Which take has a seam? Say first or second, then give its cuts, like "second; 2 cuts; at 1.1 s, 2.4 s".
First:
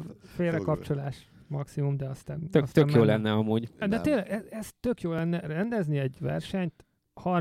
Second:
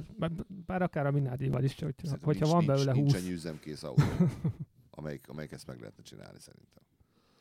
first; 1 cut; at 3.8 s